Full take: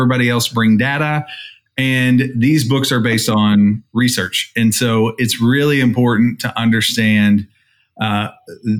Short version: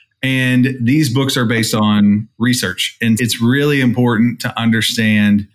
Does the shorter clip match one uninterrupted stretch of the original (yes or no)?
no